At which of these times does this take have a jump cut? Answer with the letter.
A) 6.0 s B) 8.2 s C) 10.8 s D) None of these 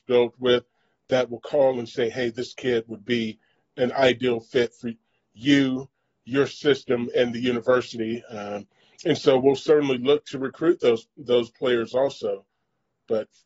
D